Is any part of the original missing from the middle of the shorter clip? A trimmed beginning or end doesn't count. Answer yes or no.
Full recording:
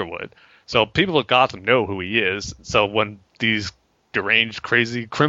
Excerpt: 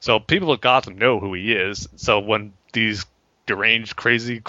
no